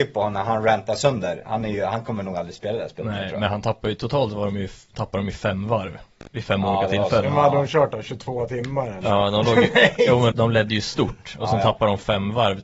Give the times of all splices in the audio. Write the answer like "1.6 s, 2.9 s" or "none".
10.3 s